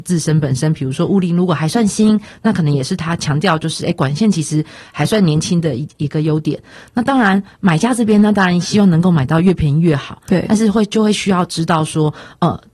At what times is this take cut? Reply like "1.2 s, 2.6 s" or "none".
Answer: none